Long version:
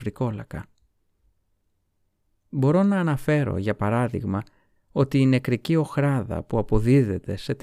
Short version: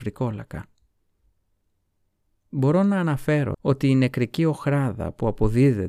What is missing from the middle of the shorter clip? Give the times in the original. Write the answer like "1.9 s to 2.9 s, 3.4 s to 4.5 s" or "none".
3.5 s to 4.9 s